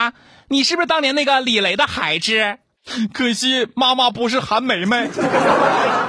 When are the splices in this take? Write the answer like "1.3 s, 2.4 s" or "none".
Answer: none